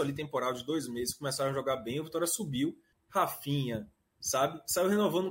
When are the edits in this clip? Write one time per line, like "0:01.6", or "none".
0:02.9